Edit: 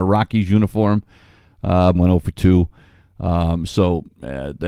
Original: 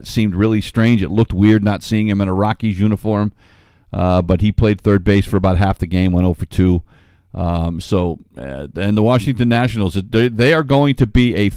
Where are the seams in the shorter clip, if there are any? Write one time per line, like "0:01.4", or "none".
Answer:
0:02.0